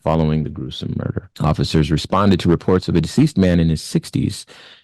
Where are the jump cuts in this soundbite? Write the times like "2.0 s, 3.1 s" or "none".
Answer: 1.3 s